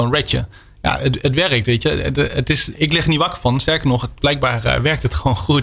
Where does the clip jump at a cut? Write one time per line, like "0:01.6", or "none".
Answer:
0:02.7